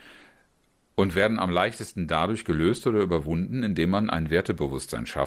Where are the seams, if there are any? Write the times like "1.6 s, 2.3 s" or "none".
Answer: none